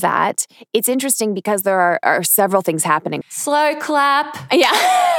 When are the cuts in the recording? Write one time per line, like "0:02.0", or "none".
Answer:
0:03.2